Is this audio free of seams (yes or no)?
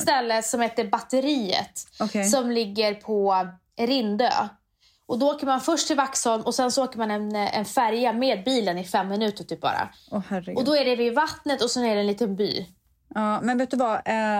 yes